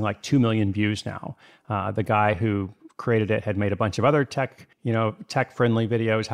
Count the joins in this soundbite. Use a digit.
1